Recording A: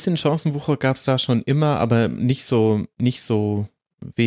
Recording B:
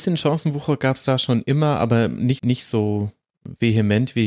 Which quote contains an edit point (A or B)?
B